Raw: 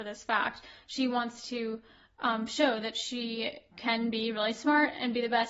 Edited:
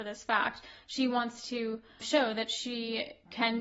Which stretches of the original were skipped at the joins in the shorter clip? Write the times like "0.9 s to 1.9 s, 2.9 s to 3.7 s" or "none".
2.0 s to 2.5 s